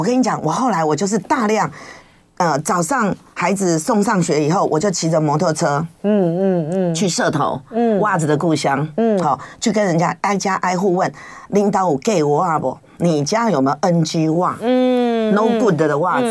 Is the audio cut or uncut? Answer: uncut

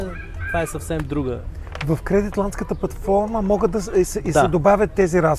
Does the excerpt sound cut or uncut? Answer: uncut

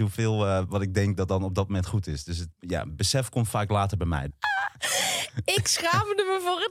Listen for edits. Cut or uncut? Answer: cut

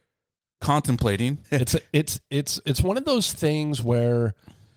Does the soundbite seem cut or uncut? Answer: cut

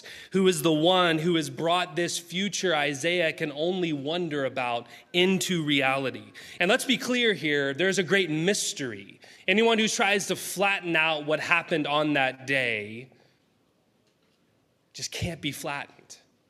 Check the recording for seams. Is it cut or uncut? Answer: cut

